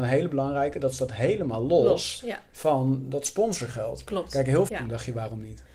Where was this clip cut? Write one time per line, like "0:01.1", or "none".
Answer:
0:04.7